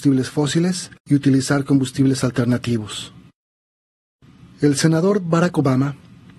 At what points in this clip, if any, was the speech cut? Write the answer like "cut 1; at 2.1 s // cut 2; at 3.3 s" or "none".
cut 1; at 1.0 s